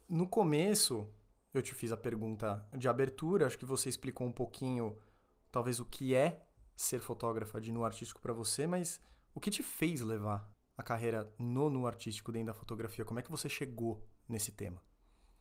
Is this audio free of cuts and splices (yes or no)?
yes